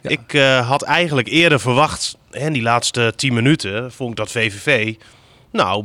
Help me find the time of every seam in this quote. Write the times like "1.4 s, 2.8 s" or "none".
none